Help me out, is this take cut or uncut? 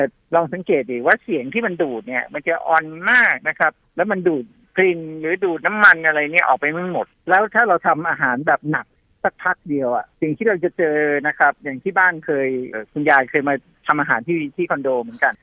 cut